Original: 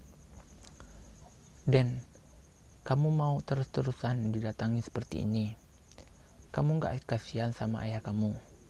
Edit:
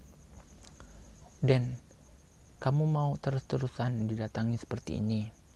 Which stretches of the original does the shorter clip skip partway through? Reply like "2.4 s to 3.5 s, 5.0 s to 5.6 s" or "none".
1.3 s to 1.6 s